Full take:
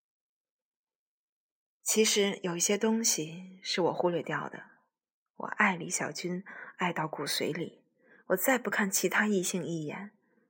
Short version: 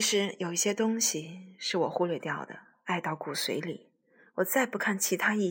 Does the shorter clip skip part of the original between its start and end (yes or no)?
yes